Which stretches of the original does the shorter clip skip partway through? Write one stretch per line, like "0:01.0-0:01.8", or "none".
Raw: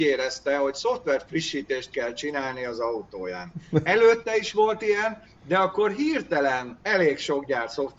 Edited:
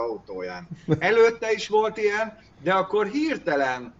none